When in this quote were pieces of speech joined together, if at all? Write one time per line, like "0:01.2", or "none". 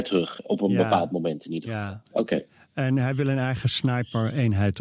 none